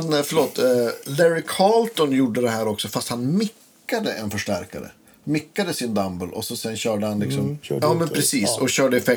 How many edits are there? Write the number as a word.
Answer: one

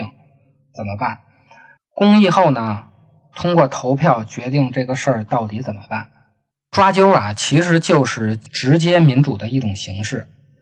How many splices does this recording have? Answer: two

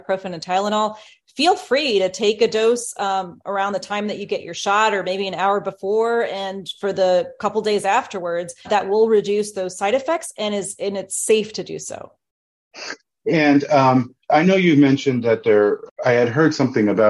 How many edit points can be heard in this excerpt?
three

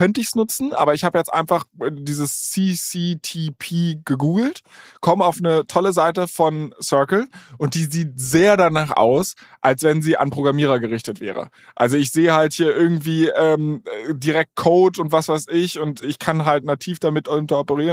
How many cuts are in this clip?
one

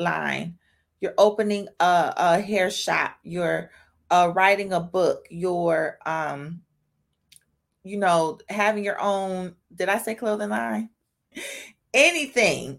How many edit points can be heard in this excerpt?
two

